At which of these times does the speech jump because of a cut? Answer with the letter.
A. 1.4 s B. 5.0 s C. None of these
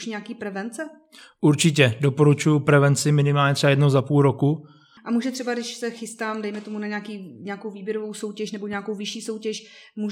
B